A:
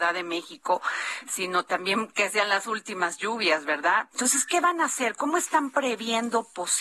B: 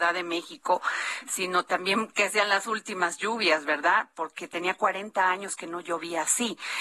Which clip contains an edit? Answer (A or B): A